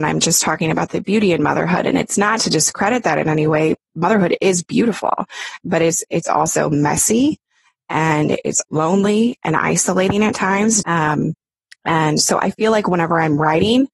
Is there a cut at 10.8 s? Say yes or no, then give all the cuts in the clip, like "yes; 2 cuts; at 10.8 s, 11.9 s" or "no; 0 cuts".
yes; 2 cuts; at 8.6 s, 10.8 s